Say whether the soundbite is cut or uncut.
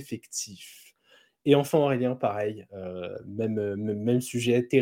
uncut